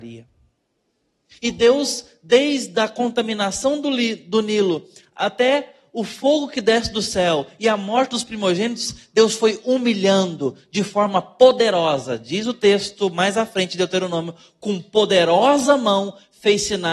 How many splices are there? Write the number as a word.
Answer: one